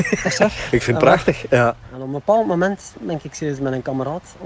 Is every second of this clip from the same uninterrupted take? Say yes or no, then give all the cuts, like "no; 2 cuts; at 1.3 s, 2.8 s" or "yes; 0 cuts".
yes; 0 cuts